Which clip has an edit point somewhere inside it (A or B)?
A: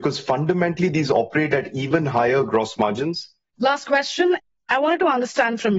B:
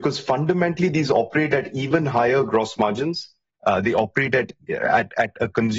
A